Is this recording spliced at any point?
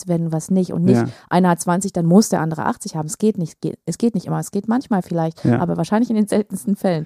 no; 0 cuts

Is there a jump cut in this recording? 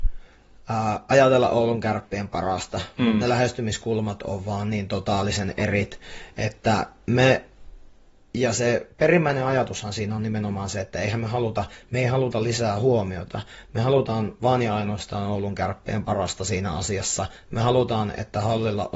no; 0 cuts

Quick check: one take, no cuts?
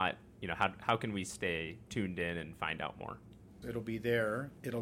no; 1 cut; at 3.6 s

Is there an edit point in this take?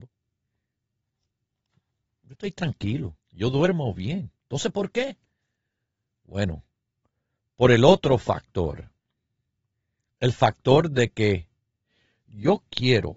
yes; 1 cut; at 3.2 s

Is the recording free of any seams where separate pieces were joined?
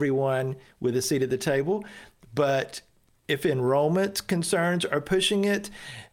yes; 0 cuts

